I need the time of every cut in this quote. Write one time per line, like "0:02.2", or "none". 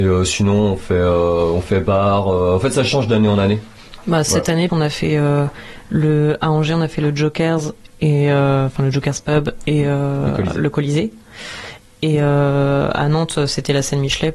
0:04.7